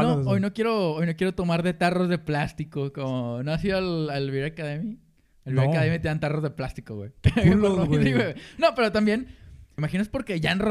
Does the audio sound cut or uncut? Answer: cut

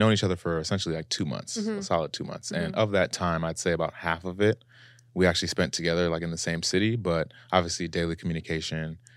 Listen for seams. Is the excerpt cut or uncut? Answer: uncut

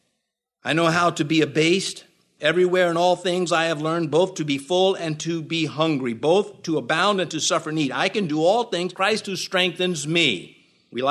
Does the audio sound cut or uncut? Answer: cut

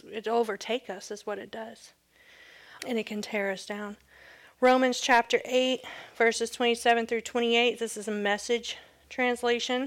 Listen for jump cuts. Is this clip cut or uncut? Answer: cut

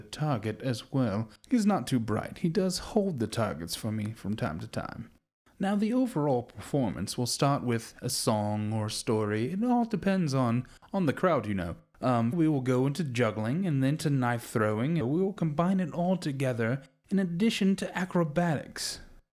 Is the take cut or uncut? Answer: cut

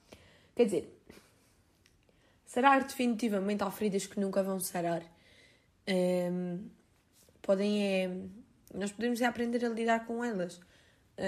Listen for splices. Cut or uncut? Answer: uncut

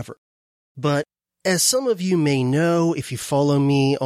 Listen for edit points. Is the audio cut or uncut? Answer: uncut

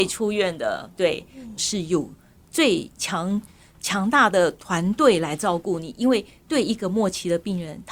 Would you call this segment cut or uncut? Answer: cut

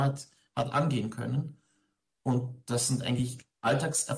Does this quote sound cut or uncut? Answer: uncut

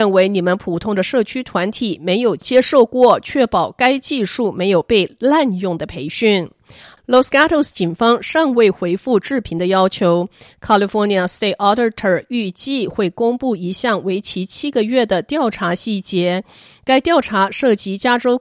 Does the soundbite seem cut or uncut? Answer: uncut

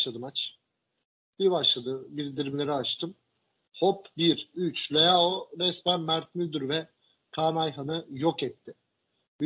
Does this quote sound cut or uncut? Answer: cut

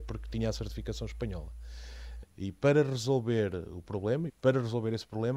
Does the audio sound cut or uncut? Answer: cut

